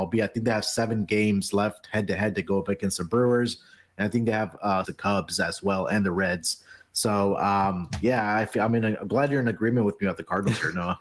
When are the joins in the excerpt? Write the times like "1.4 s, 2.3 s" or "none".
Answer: 4.8 s, 8.7 s